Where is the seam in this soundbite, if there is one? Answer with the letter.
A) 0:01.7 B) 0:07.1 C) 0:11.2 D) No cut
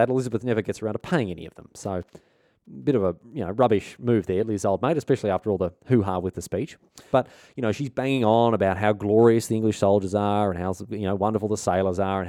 B